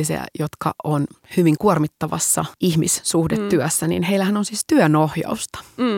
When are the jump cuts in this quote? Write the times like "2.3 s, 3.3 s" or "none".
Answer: none